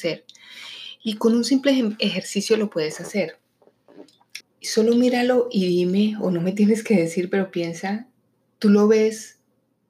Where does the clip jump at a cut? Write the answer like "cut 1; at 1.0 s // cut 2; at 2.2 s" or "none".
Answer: cut 1; at 4.4 s